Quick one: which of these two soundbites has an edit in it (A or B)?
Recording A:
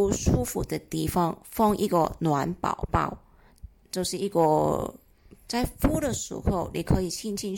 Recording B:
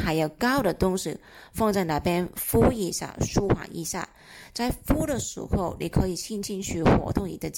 A